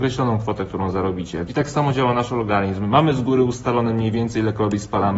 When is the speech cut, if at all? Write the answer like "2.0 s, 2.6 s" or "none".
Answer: 1.5 s